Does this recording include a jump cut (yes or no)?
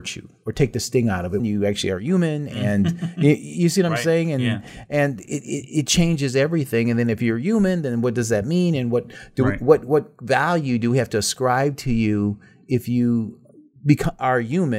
yes